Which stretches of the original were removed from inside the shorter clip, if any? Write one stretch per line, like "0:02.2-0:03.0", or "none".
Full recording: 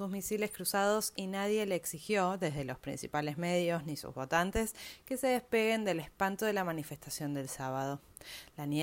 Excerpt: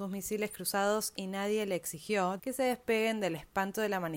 0:02.4-0:05.0